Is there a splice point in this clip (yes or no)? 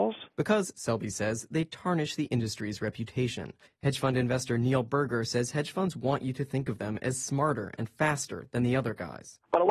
yes